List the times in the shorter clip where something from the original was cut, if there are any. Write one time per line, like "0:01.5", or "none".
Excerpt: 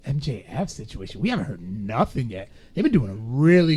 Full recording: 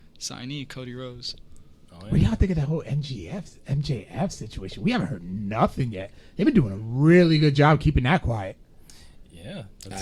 none